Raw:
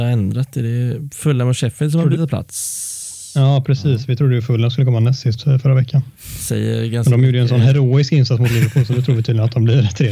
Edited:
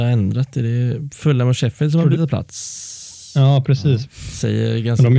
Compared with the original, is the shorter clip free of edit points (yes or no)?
no